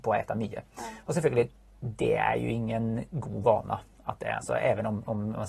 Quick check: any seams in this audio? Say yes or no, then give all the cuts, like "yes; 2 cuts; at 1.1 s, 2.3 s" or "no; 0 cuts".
no; 0 cuts